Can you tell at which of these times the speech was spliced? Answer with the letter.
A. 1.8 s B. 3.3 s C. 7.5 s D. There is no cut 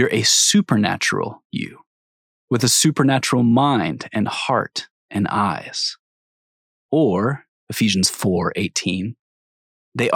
C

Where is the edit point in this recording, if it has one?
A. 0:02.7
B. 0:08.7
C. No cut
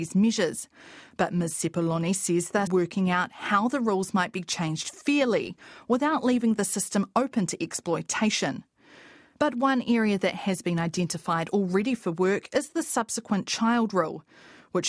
A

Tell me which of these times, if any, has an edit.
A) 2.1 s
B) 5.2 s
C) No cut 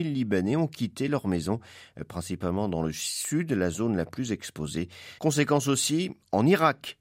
B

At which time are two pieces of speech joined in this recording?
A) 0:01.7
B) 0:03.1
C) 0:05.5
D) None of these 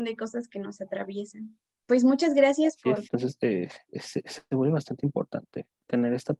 B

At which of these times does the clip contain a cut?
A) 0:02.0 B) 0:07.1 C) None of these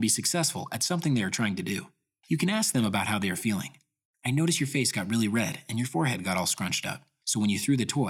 C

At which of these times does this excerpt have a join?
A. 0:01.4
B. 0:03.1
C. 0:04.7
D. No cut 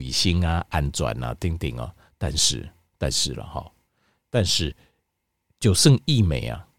D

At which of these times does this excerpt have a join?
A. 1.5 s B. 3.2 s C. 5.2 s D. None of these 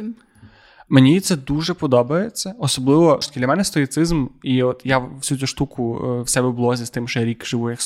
B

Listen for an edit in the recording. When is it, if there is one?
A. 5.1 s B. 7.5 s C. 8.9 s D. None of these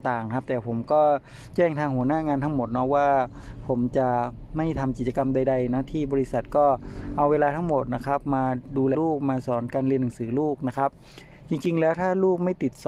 C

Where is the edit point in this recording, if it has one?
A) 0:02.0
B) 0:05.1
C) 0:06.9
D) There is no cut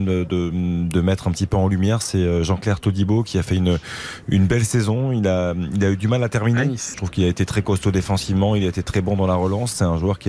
C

